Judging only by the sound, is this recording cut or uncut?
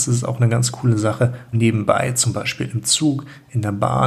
cut